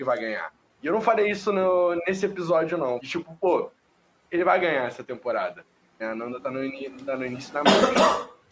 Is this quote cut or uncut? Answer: cut